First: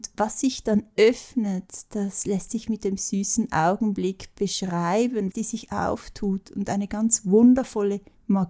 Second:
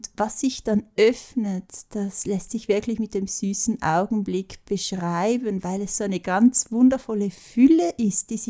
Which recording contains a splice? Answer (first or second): first